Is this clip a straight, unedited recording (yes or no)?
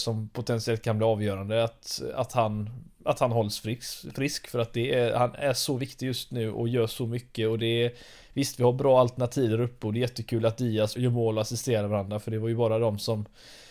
no